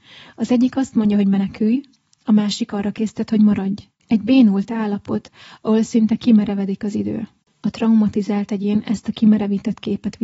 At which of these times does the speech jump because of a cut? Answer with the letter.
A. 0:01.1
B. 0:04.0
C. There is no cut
B